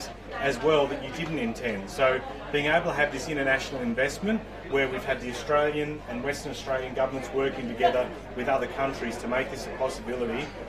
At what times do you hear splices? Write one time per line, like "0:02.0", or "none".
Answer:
0:04.7

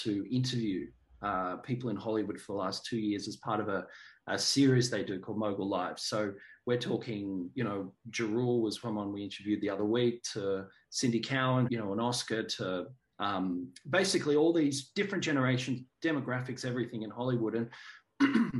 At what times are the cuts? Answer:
0:11.7

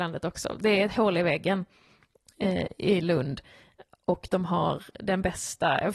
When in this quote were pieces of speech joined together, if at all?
none

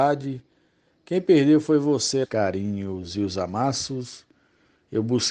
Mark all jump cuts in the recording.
0:02.2

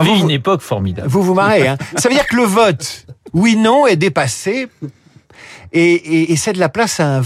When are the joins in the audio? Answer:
0:06.2

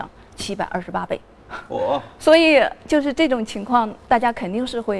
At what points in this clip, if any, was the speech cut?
none

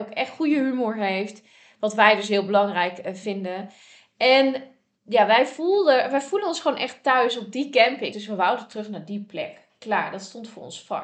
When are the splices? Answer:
0:08.1

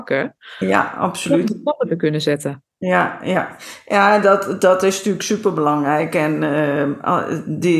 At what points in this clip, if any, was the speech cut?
none

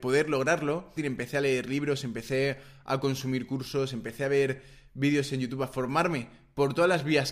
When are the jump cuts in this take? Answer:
0:01.0

